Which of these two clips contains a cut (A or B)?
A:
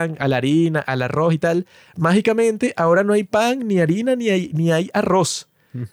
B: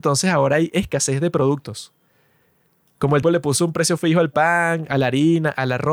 B